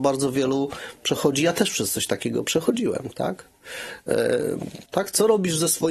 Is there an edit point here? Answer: yes; 1 cut; at 4.9 s

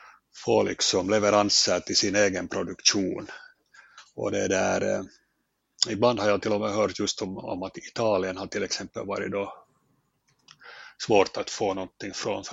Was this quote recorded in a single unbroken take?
yes; 0 cuts

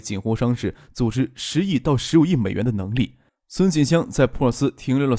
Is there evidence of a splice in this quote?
yes; 1 cut; at 3.3 s

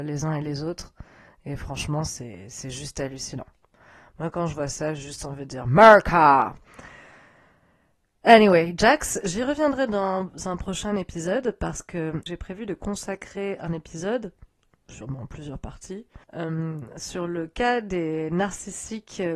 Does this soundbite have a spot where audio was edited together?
yes; 1 cut; at 16.2 s

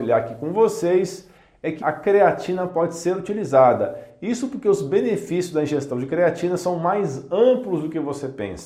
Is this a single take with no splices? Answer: no; 1 cut; at 1.8 s

